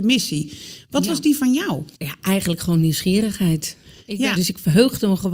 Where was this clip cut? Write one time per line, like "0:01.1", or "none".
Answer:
0:01.9
0:04.4